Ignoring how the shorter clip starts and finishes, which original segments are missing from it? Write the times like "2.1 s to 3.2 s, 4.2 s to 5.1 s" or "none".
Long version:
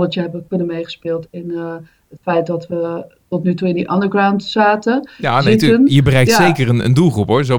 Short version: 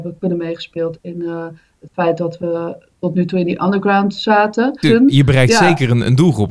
5.1 s to 5.6 s

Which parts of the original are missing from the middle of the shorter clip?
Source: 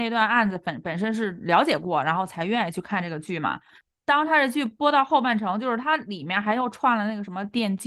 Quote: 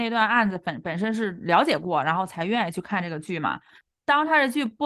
none

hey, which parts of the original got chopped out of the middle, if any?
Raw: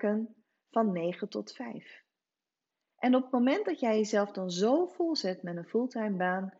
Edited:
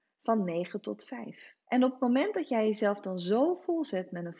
2.1 s to 2.9 s

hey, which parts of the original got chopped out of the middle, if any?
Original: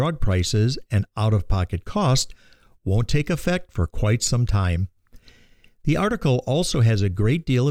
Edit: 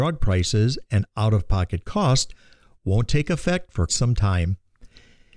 3.9 s to 4.2 s

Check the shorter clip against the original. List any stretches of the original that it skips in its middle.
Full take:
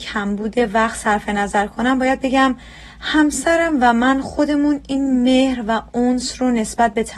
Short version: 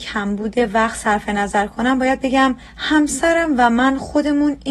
2.7 s to 2.9 s

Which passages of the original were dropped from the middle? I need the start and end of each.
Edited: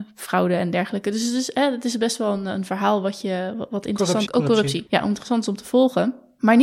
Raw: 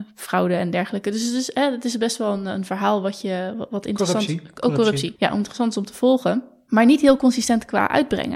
4.3 s to 4.6 s

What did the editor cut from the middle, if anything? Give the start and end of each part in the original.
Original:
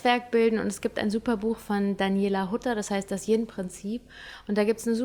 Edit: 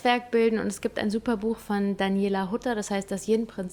none

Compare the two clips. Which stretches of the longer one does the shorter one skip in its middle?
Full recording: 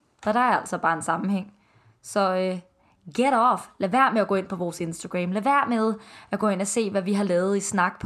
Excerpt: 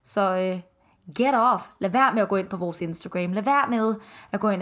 none

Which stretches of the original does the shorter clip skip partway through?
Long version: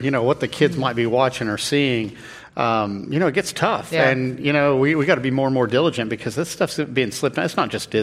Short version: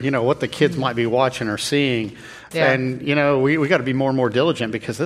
2.5 s to 3.9 s

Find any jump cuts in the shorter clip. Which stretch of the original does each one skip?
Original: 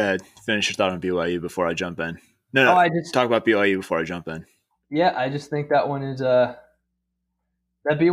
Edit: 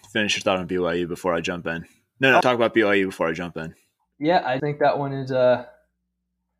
2.7 s to 3.1 s, 5.3 s to 5.5 s

